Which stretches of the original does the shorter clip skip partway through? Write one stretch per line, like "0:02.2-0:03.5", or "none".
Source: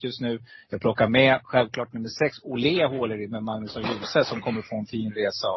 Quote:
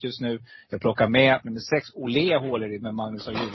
0:01.4-0:01.9